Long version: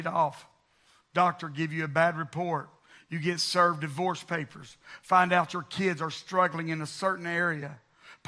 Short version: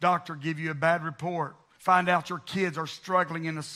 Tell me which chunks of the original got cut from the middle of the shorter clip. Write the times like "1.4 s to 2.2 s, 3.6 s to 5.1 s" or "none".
2.9 s to 5.0 s